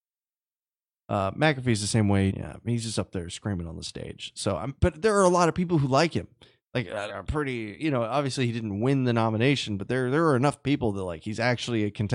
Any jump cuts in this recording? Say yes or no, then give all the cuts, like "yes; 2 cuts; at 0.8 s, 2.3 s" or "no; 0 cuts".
yes; 2 cuts; at 2.3 s, 7.1 s